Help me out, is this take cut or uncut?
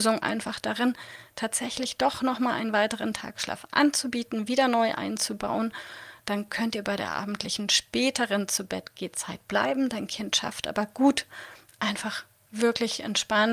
uncut